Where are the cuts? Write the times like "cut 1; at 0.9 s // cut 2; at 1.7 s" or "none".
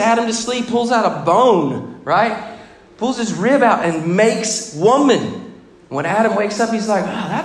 none